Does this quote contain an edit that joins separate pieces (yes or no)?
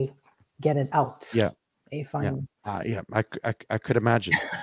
yes